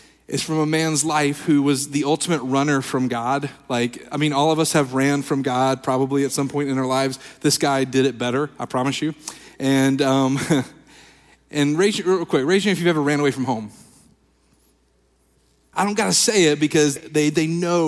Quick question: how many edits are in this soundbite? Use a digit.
2